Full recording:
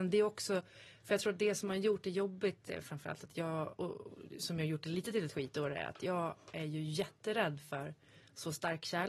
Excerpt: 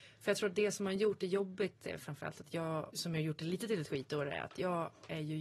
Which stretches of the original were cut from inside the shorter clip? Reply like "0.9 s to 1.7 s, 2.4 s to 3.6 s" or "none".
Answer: 3.8 s to 4.4 s